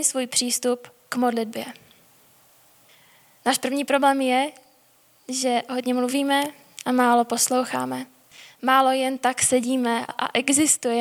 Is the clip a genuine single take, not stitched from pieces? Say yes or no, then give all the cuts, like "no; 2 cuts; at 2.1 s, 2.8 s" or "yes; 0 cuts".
no; 1 cut; at 10.1 s